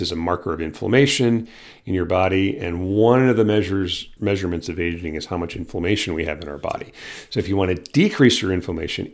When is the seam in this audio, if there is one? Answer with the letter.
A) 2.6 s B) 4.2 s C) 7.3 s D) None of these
B